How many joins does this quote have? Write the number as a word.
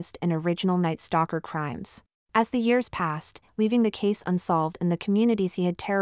two